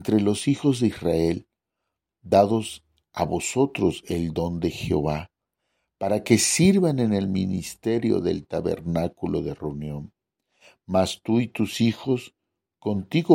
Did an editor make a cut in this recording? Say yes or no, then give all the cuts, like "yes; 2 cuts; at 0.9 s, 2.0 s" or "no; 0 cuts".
no; 0 cuts